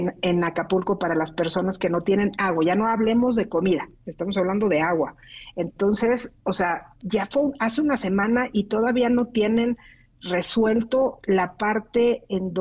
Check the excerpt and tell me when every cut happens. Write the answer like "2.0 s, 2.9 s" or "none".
6.9 s